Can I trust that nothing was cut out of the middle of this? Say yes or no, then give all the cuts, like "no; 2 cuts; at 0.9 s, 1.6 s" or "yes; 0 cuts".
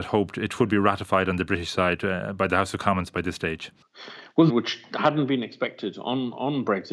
no; 1 cut; at 4.5 s